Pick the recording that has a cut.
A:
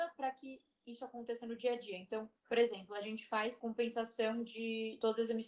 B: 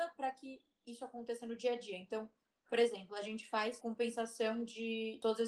A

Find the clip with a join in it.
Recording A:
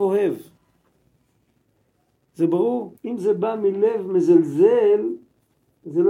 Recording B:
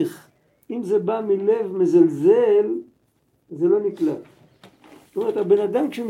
A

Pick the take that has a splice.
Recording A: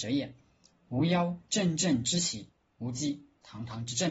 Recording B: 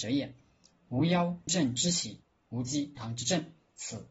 B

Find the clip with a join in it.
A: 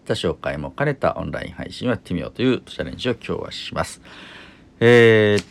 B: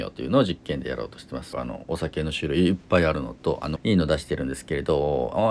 B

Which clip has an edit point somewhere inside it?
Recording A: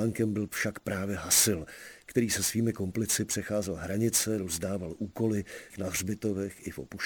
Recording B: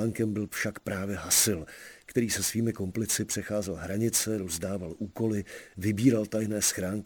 A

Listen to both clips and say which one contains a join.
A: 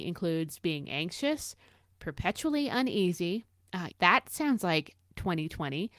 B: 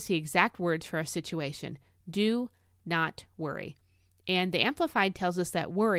A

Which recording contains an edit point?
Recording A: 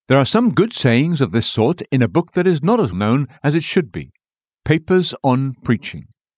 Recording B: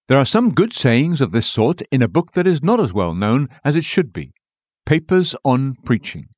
A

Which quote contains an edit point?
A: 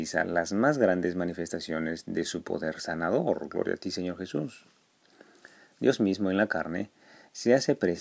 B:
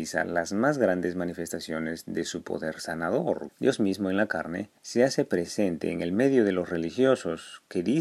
B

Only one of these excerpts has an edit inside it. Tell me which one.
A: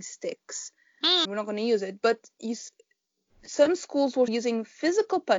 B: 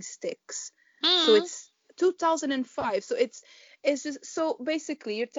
A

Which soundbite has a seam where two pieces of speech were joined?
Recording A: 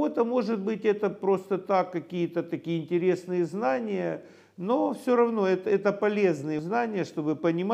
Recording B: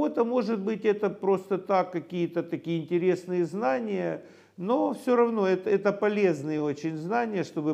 A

